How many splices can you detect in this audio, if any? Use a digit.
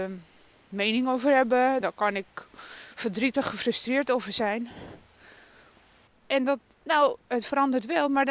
2